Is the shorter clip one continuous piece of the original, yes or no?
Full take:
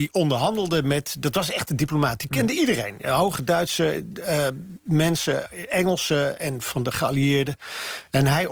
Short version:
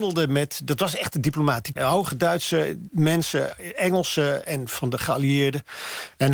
no